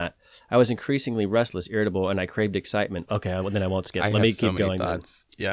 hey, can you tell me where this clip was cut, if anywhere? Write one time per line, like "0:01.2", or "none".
0:03.1